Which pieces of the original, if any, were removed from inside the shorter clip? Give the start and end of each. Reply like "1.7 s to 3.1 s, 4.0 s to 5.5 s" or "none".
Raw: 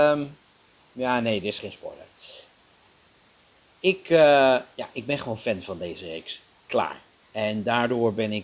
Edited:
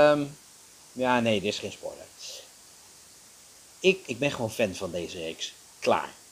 4.0 s to 4.9 s